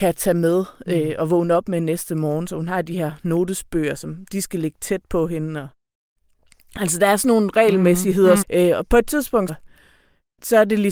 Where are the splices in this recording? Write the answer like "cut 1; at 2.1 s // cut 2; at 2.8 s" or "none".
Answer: cut 1; at 8.4 s // cut 2; at 9.5 s